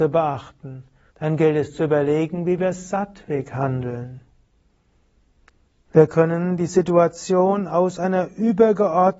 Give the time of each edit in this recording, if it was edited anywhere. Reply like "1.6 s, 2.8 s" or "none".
1.1 s, 5.8 s